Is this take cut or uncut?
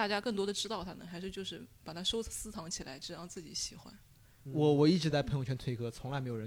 uncut